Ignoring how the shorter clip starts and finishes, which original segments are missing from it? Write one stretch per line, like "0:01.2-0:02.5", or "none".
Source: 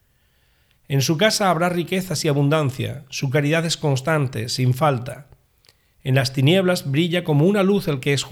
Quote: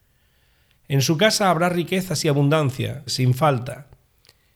0:03.1-0:04.5